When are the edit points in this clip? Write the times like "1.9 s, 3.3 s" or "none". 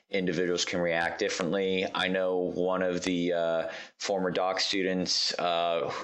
none